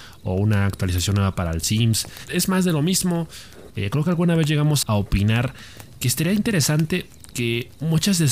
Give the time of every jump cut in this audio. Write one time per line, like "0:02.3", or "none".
0:03.7
0:04.8